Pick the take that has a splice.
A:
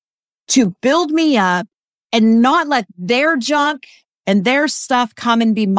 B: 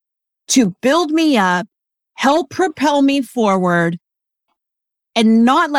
A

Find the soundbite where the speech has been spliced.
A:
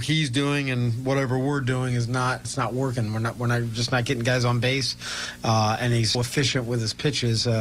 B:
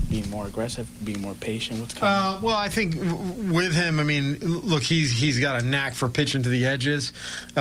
A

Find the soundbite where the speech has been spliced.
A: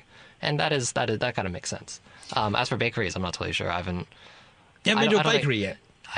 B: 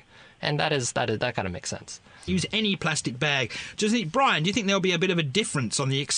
B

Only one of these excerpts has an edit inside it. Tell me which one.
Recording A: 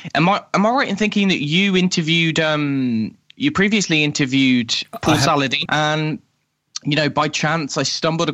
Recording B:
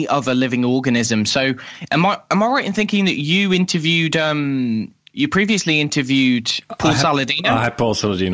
A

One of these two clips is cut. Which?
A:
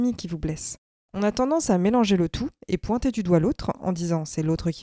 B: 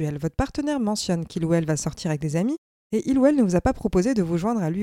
A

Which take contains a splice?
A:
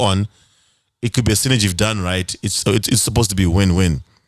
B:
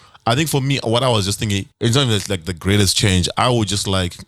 B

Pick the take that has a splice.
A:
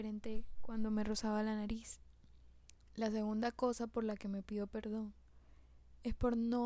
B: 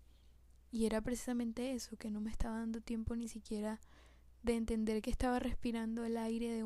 A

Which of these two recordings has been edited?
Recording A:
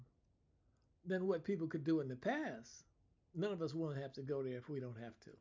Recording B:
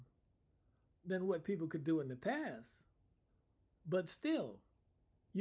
A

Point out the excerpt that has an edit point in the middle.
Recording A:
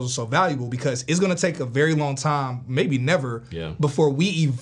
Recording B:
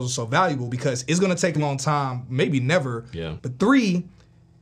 B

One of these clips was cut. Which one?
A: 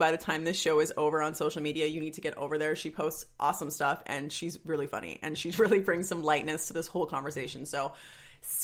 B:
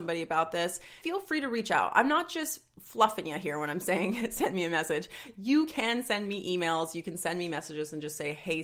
B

